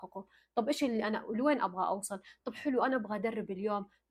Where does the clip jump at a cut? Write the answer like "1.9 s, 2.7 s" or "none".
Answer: none